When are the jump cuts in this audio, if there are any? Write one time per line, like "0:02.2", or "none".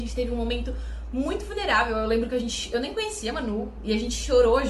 none